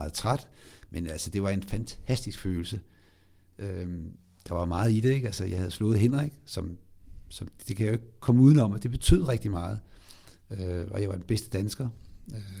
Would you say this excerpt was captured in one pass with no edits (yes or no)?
yes